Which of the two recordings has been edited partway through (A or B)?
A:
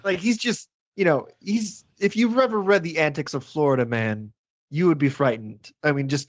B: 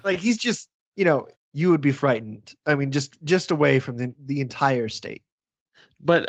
B